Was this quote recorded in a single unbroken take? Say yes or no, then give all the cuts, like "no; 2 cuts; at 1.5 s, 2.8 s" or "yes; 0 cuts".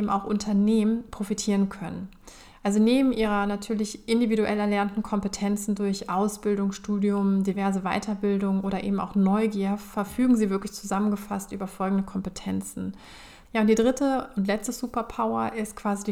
no; 1 cut; at 13.4 s